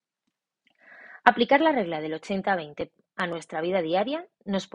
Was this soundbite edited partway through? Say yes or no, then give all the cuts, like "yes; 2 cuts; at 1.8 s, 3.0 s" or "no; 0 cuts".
no; 0 cuts